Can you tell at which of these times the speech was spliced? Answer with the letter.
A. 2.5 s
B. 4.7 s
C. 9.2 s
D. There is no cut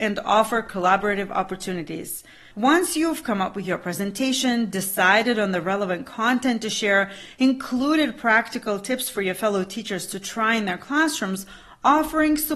A